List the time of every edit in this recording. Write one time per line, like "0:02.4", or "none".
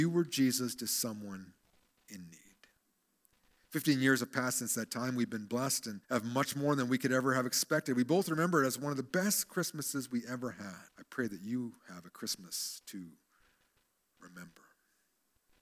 0:06.0
0:10.9